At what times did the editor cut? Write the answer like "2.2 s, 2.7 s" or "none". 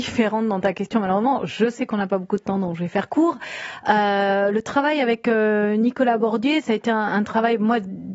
none